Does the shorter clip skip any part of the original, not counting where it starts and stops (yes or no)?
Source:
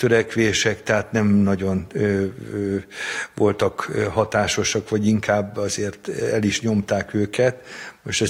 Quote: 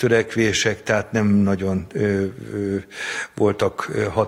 no